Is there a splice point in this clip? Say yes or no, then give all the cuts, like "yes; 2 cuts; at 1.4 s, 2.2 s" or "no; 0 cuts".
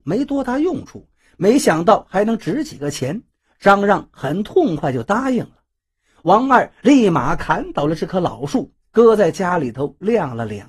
no; 0 cuts